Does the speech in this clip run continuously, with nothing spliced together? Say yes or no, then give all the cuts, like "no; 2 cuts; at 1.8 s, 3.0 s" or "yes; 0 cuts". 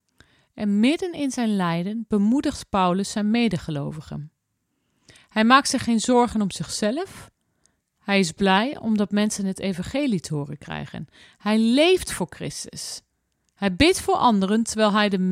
yes; 0 cuts